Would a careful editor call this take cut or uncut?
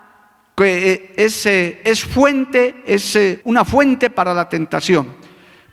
cut